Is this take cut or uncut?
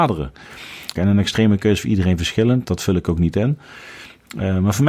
cut